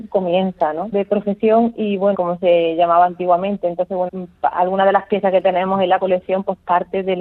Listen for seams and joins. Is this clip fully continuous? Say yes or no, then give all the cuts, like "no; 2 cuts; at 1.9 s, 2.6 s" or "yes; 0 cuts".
no; 3 cuts; at 0.9 s, 2.1 s, 4.1 s